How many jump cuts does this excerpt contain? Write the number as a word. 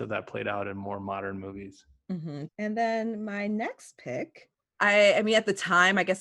one